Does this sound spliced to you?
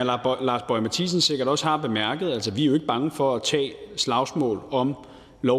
no; 0 cuts

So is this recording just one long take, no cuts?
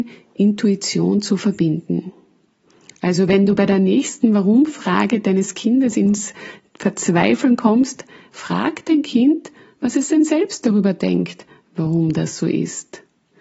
yes; 0 cuts

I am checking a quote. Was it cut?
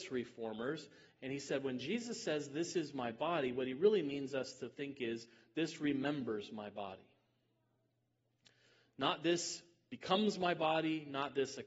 no; 0 cuts

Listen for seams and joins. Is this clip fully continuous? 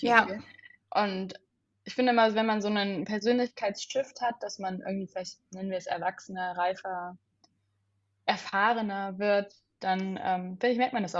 yes; 0 cuts

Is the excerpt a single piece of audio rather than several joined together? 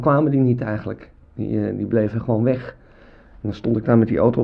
yes; 0 cuts

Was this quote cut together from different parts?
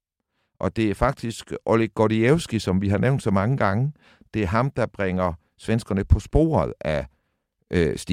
no; 0 cuts

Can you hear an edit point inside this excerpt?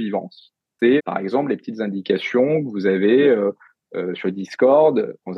yes; 1 cut; at 1.0 s

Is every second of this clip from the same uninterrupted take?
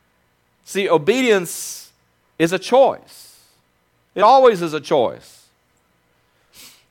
yes; 0 cuts

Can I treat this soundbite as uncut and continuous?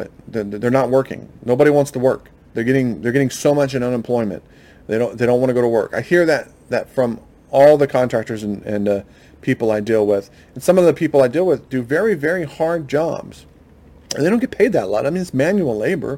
yes; 0 cuts

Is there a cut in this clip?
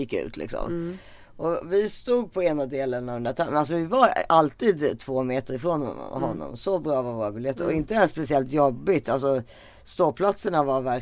no; 0 cuts

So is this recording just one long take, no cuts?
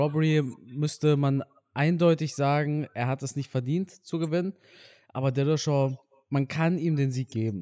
yes; 0 cuts

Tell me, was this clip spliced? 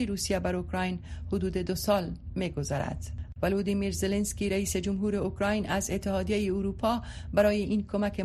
yes; 1 cut; at 3.4 s

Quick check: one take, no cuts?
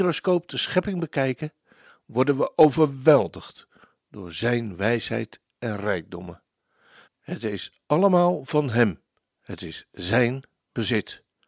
no; 1 cut; at 7.1 s

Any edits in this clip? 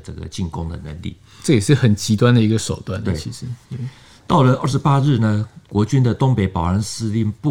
no; 0 cuts

